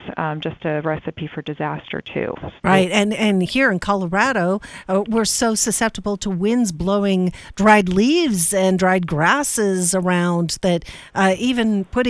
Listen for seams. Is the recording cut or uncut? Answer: cut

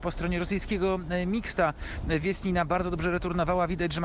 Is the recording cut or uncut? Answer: uncut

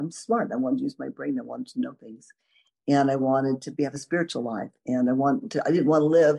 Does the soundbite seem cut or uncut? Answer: uncut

